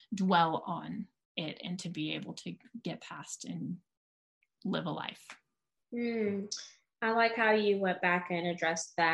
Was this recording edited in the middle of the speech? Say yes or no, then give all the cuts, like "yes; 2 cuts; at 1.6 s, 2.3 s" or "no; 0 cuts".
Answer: no; 0 cuts